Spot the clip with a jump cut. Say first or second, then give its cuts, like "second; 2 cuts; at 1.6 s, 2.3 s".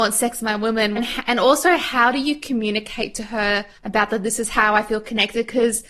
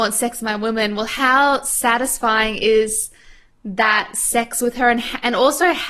first; 2 cuts; at 1.0 s, 3.8 s